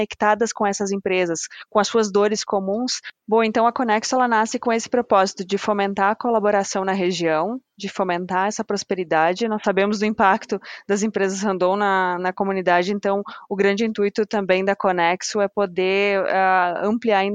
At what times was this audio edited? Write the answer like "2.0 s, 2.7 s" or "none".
none